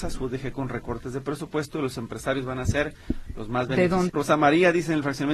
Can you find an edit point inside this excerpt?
yes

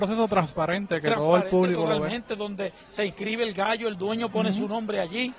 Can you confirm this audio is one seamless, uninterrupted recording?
yes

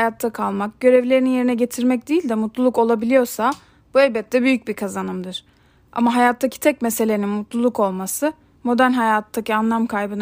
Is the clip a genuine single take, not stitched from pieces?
yes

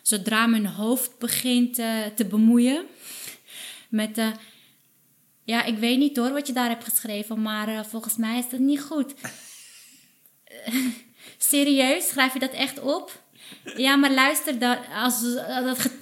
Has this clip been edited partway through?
no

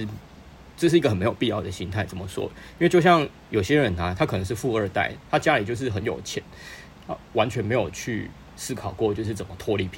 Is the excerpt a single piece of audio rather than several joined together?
yes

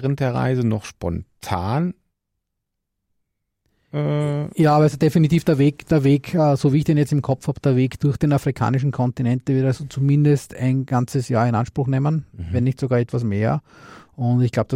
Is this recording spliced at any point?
no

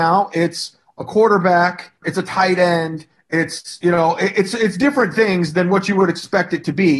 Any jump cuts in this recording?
yes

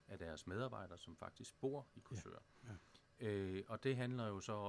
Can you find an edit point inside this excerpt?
no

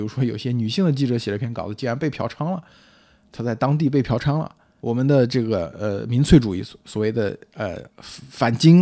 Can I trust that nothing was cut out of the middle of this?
no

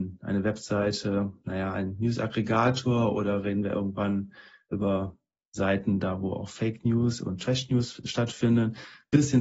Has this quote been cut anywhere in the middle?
no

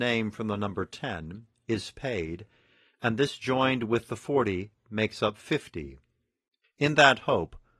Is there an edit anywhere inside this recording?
yes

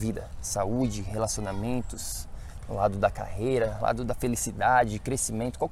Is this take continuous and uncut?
yes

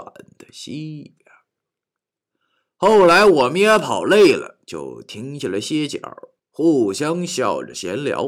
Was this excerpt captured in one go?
yes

